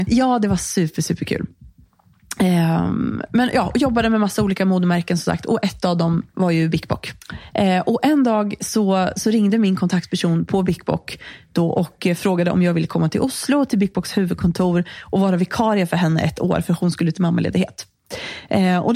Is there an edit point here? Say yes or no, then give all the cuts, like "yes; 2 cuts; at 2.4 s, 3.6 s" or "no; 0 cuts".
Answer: no; 0 cuts